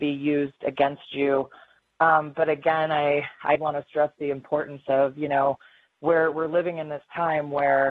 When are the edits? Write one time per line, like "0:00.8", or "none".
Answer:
0:03.6